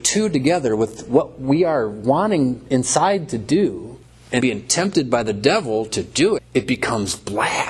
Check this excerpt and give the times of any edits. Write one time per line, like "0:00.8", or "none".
0:04.4
0:06.4